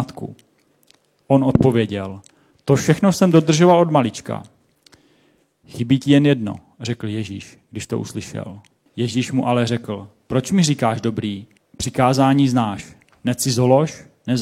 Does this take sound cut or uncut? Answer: cut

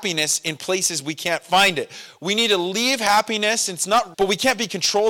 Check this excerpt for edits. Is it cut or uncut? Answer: cut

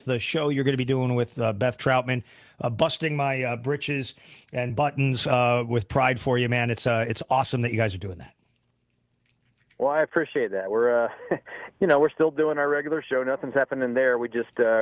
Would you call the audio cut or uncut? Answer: cut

